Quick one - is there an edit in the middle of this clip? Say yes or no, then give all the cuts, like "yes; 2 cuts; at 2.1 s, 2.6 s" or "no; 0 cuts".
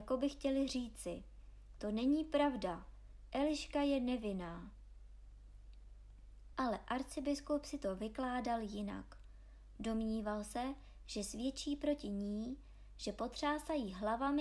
no; 0 cuts